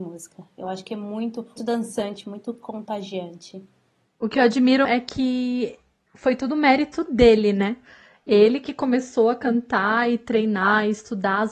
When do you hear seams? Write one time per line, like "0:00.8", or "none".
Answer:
0:01.6
0:04.8